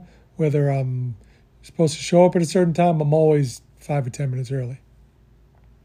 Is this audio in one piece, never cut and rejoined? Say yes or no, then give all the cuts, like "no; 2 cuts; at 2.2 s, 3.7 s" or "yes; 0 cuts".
yes; 0 cuts